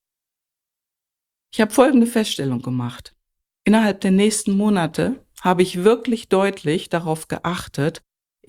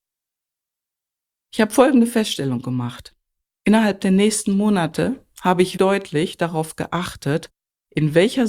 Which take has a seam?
second; 1 cut; at 5.8 s

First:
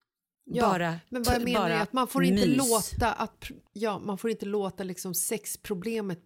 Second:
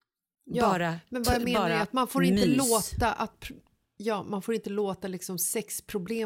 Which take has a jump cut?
first; 1 cut; at 3.7 s

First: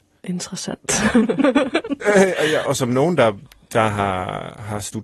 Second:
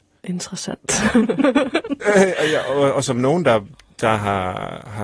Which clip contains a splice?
first; 1 cut; at 2.7 s

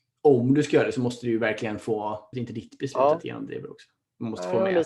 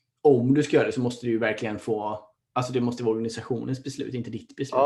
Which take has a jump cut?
first; 1 cut; at 2.3 s

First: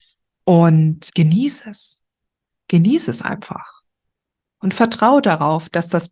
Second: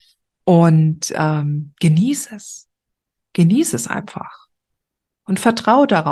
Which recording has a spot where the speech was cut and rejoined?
first; 1 cut; at 1.1 s

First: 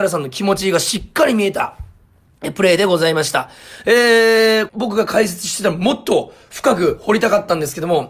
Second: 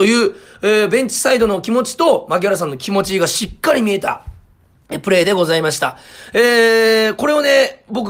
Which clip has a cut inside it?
first; 1 cut; at 4.7 s

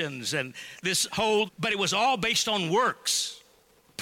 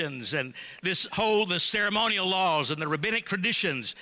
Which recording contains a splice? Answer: first; 1 cut; at 1.5 s

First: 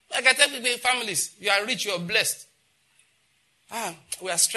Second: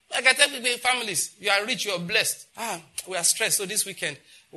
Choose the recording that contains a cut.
second; 1 cut; at 2.5 s

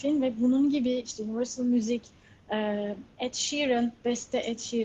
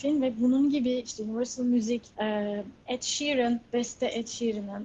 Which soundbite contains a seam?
second; 1 cut; at 2.1 s

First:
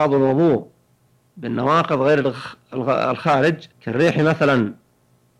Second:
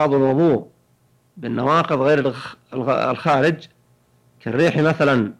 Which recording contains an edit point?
first; 1 cut; at 3.7 s

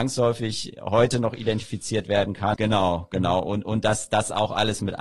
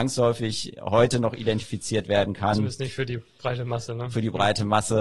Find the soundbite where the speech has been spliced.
first; 1 cut; at 2.5 s

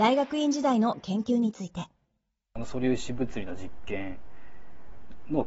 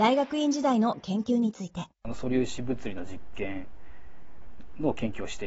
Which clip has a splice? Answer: second; 1 cut; at 1.9 s

